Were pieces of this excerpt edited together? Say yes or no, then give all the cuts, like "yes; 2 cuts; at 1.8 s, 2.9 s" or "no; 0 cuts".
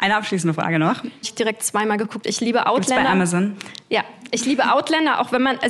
yes; 1 cut; at 1.2 s